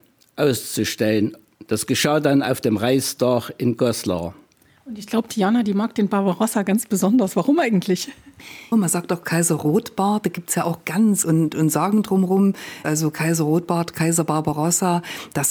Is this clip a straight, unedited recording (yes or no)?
no